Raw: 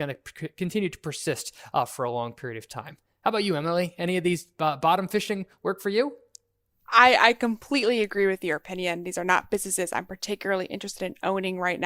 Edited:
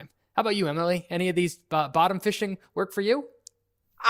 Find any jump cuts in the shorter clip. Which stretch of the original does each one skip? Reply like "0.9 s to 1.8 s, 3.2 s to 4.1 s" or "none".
none